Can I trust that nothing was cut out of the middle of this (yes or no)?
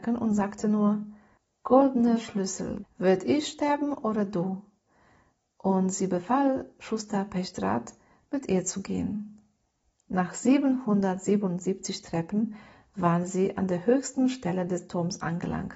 no